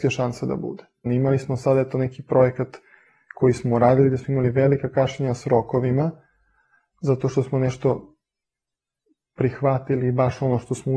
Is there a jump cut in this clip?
yes; 1 cut; at 1.1 s

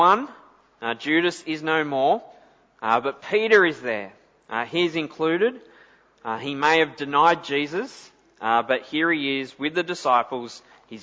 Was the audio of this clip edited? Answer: no; 0 cuts

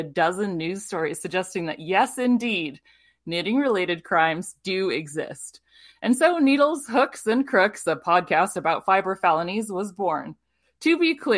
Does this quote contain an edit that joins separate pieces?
no; 0 cuts

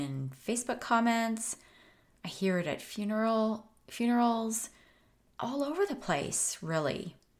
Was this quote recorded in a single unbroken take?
no; 1 cut; at 5.3 s

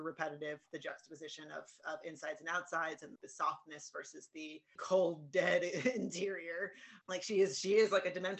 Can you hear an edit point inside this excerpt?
yes; 3 cuts; at 3.2 s, 4.8 s, 7.0 s

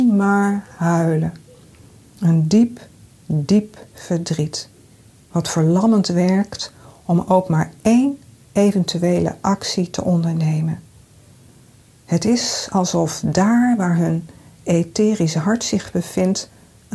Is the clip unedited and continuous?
yes; 0 cuts

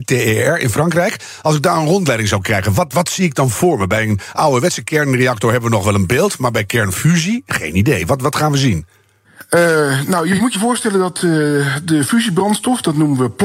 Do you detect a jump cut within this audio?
no; 0 cuts

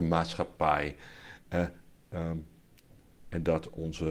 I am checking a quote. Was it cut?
no; 0 cuts

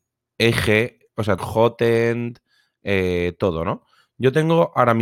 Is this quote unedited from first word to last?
no; 1 cut; at 1.4 s

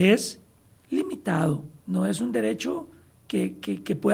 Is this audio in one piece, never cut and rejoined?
no; 1 cut; at 1.8 s

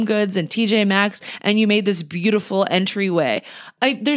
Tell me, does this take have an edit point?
no; 0 cuts

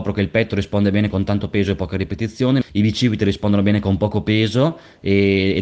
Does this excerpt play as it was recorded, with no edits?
no; 1 cut; at 2.6 s

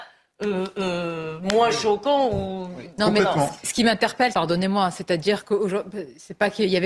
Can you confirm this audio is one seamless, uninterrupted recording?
no; 1 cut; at 4.3 s

